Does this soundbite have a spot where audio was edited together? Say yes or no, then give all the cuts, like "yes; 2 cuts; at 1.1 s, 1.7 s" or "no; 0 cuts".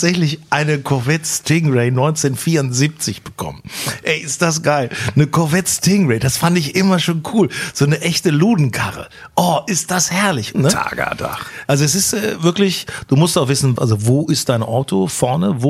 yes; 3 cuts; at 10.5 s, 11.7 s, 13.8 s